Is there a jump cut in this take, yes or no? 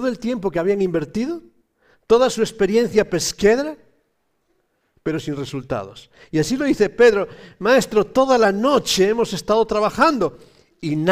no